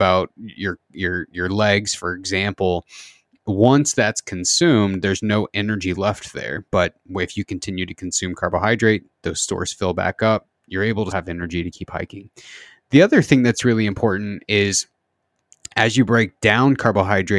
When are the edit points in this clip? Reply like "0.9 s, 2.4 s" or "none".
11.1 s